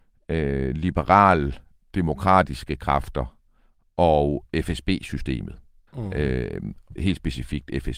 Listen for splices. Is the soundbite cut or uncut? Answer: cut